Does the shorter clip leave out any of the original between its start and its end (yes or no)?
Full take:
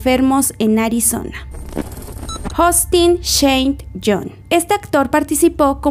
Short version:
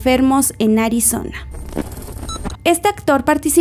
yes